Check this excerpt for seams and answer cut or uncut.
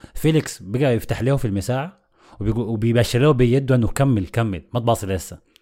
uncut